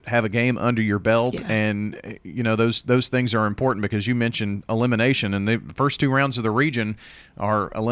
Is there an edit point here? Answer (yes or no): no